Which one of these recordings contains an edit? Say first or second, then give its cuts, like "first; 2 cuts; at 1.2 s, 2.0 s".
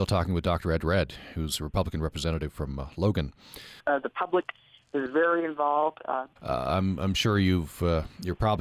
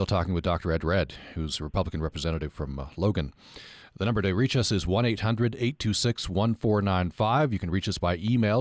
first; 2 cuts; at 3.8 s, 6.4 s